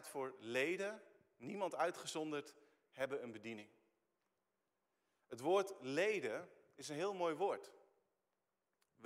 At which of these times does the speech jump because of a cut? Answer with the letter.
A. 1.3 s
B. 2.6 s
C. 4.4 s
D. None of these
D